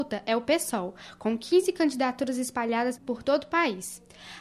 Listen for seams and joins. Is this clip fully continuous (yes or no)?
no